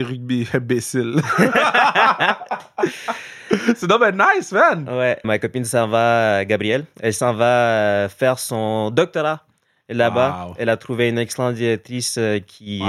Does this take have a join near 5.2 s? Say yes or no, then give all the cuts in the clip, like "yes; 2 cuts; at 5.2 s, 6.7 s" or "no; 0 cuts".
yes; 1 cut; at 5.2 s